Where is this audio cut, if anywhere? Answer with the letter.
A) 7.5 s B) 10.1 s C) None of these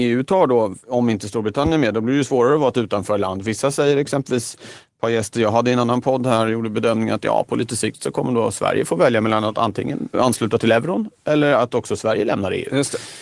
B